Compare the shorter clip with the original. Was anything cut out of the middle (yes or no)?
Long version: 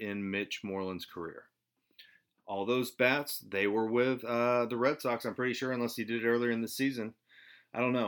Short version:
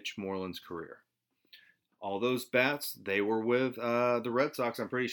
no